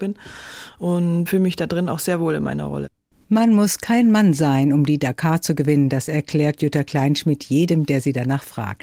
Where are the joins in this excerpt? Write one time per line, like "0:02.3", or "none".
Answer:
0:01.3